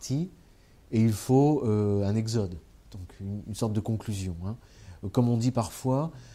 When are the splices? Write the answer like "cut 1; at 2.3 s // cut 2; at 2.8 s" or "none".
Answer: none